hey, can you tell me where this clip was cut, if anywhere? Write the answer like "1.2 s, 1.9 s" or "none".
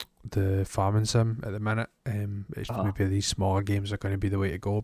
2.7 s

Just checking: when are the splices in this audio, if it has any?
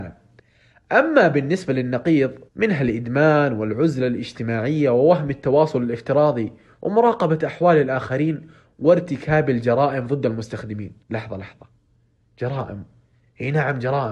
2.5 s, 11.0 s

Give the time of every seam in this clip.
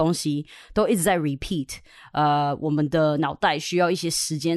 none

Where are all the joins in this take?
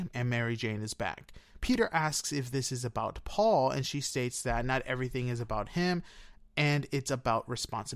1.6 s

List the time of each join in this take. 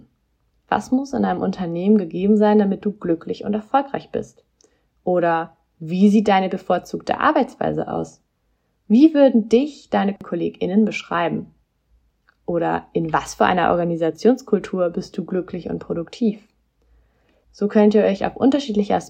17.4 s

